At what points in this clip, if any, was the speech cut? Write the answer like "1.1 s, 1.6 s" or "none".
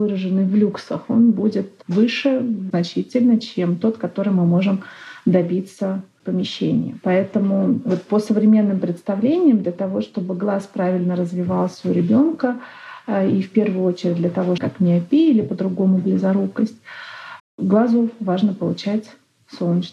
14.6 s, 17.4 s